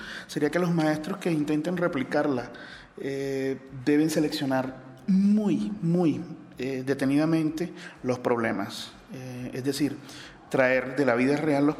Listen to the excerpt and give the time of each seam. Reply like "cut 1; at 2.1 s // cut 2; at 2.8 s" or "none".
none